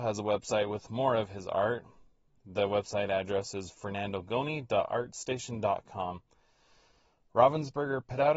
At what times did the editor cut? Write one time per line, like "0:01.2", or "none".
none

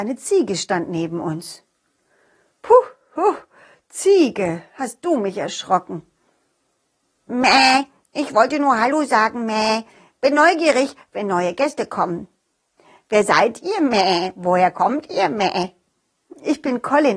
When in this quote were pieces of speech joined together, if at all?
none

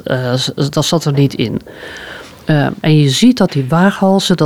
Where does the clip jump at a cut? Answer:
0:02.8

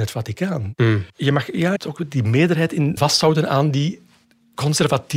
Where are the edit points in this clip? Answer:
0:01.8
0:03.0

